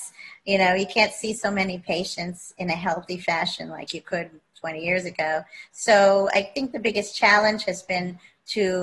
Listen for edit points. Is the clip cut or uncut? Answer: uncut